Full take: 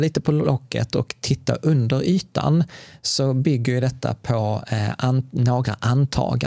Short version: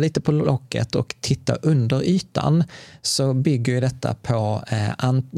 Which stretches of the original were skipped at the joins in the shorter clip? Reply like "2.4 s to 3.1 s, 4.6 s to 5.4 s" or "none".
none

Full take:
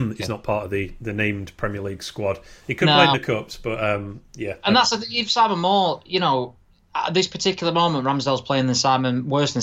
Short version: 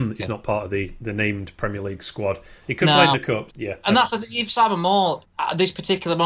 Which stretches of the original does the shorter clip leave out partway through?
3.5 s to 4.3 s, 6.0 s to 6.8 s

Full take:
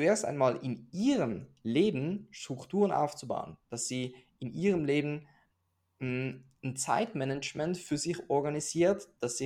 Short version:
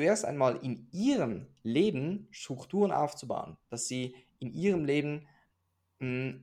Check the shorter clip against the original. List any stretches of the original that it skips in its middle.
none

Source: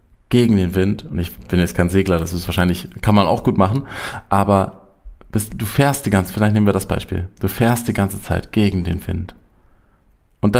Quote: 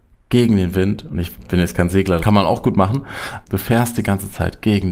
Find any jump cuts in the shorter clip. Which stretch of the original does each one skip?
2.2 s to 3.0 s, 4.2 s to 7.3 s

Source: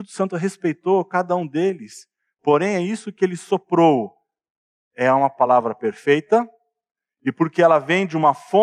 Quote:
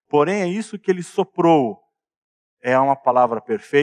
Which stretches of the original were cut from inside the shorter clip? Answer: none

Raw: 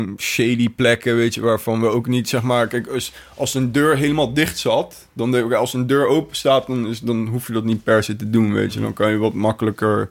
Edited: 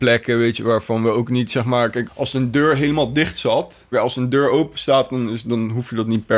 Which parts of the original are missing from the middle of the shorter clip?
2.8 s to 3.3 s, 5.1 s to 5.5 s

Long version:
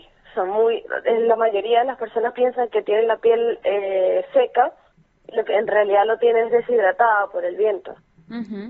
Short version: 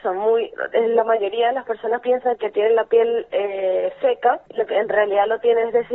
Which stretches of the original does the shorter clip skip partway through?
4.8 s to 5.2 s

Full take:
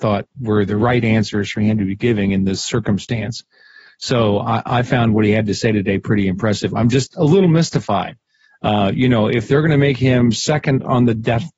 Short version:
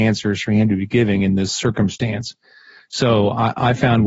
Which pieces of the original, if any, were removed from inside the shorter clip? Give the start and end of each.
none

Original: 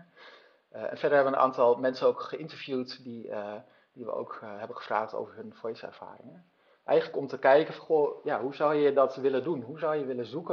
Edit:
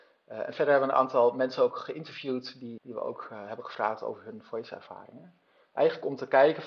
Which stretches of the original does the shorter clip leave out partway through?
3.2 s to 3.9 s

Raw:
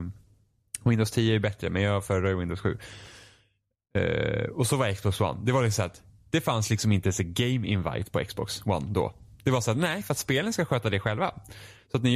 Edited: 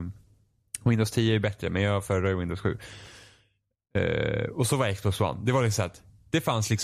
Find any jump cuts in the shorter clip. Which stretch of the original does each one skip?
none

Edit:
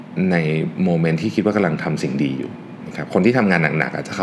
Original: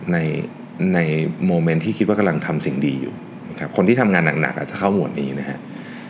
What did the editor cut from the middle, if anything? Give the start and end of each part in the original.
none

